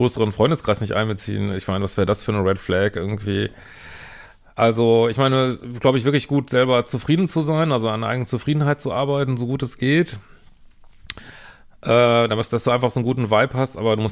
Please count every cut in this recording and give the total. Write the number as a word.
zero